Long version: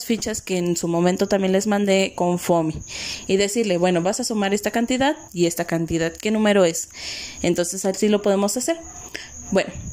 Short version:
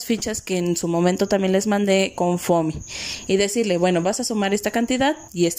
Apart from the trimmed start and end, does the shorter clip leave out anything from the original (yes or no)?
no